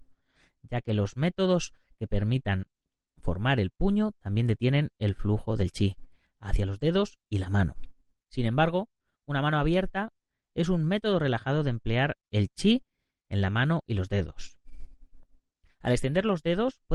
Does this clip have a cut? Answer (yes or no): no